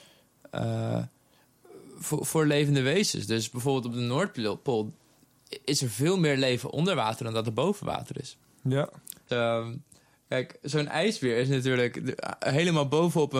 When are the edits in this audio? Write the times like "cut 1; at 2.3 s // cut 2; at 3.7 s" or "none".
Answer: cut 1; at 9.3 s